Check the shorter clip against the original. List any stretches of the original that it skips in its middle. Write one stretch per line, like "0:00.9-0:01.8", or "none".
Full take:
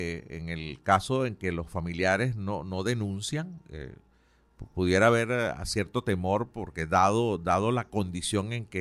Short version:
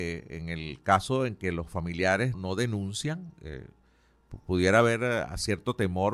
0:02.3-0:02.6